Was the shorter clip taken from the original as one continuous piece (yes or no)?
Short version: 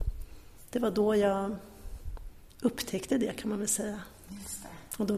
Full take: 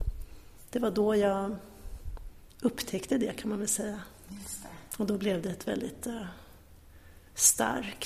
yes